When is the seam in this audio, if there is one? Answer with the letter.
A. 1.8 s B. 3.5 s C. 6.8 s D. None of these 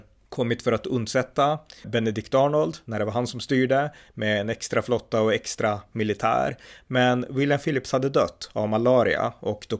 A